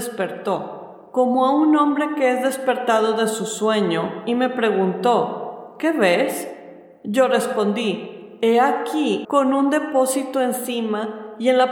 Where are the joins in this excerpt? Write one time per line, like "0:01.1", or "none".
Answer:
0:09.2